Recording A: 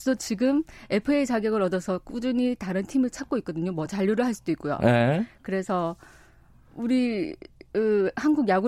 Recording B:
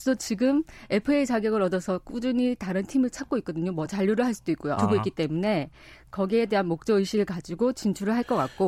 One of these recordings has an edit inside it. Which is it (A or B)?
B